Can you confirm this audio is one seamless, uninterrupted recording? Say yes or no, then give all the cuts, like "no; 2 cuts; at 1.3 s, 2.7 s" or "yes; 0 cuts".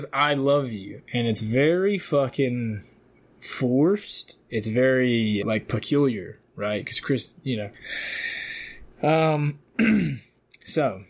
no; 1 cut; at 5.4 s